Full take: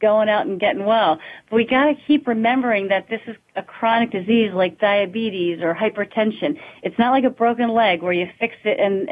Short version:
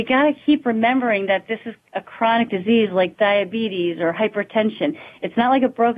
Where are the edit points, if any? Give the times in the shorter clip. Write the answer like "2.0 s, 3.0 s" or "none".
none